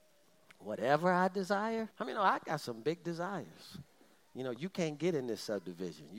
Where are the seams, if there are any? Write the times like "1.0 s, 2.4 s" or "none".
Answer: 1.9 s, 4.1 s